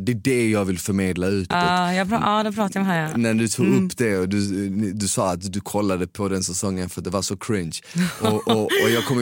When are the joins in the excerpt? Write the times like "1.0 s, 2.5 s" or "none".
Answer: 1.5 s